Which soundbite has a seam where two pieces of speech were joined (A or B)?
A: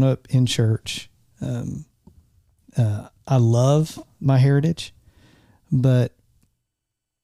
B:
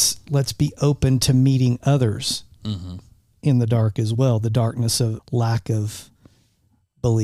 B